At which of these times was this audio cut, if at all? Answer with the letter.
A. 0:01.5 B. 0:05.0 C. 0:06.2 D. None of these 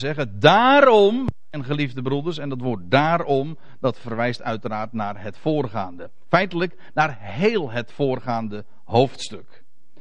D